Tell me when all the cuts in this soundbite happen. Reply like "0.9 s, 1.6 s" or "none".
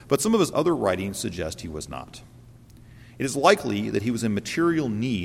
none